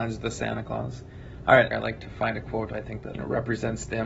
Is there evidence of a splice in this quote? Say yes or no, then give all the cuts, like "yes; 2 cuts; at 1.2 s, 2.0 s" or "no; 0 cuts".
yes; 2 cuts; at 1.7 s, 3.1 s